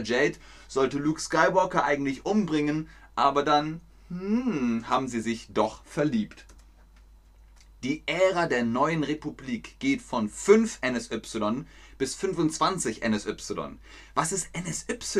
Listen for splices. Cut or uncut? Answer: uncut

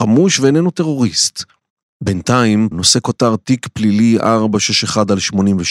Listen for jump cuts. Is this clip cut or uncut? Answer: cut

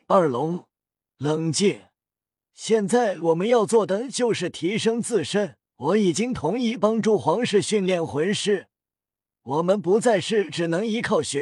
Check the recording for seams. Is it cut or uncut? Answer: cut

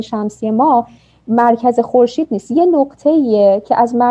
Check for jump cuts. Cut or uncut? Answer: uncut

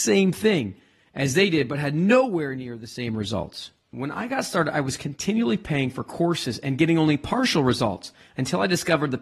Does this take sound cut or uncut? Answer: cut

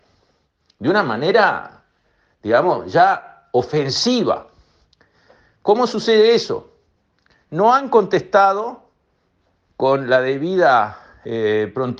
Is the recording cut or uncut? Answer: uncut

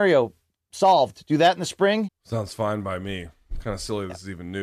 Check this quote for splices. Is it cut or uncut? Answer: cut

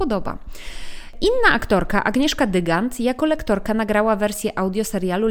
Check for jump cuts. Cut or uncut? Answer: uncut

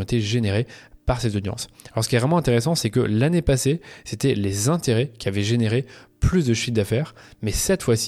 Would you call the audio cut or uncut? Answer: uncut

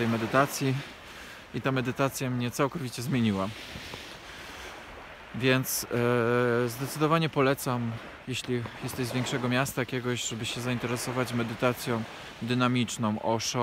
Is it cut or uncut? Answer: uncut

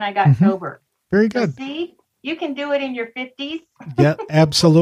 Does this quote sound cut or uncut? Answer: uncut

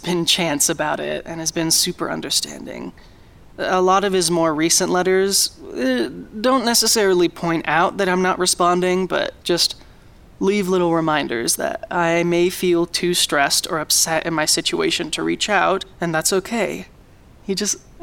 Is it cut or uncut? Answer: uncut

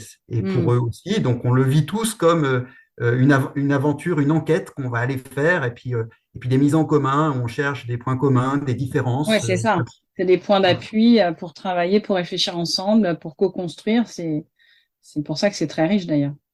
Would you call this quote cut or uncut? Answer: uncut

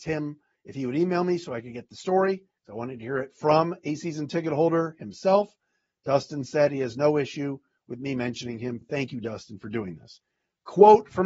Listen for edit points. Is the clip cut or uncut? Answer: uncut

